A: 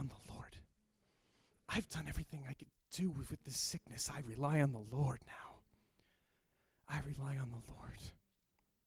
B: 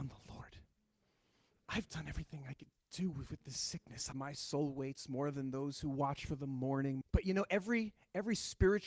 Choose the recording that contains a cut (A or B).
B